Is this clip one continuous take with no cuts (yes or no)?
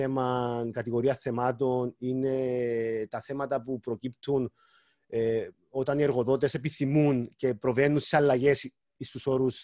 yes